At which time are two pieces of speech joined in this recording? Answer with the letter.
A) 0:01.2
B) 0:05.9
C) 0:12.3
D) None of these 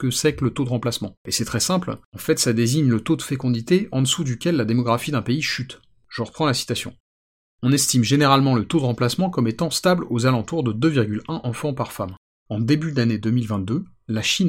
D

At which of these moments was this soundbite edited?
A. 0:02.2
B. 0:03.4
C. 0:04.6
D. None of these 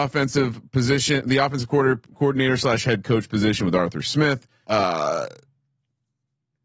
C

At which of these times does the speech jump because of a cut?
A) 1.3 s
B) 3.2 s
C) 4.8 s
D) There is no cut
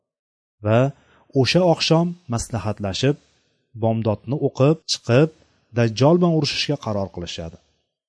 C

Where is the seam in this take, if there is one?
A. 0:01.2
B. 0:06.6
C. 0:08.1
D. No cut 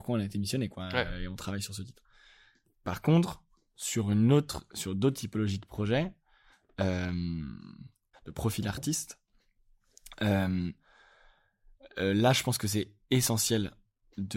C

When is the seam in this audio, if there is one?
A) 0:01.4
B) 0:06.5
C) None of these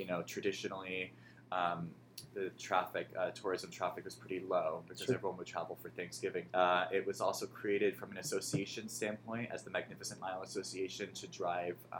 B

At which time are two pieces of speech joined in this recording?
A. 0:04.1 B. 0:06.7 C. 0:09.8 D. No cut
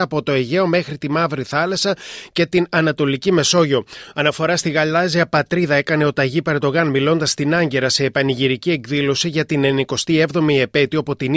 A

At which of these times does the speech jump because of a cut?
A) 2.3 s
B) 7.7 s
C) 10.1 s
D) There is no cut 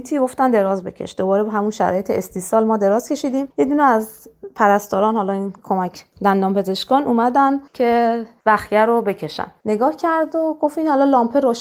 B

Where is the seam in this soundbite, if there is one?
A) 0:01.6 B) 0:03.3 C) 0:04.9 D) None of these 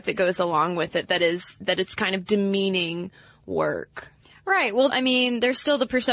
C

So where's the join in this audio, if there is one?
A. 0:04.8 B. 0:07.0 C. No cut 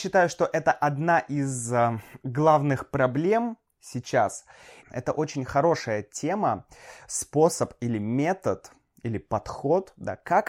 A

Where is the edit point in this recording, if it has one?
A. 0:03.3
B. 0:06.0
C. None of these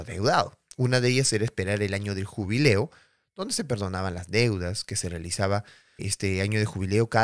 B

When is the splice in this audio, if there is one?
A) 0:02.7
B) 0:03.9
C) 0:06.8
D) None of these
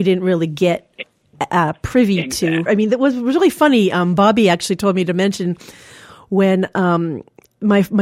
A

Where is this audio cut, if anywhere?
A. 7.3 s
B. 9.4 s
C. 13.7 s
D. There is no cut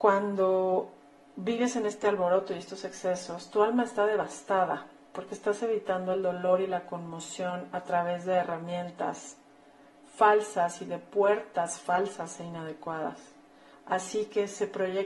C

